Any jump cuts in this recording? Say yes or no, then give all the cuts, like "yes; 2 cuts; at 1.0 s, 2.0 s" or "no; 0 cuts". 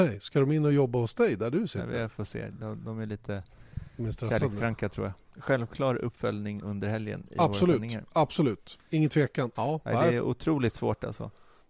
yes; 2 cuts; at 5.3 s, 9.5 s